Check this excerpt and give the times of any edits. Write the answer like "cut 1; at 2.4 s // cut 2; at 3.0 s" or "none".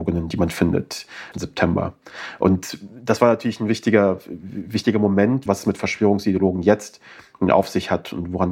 cut 1; at 1.3 s // cut 2; at 5.5 s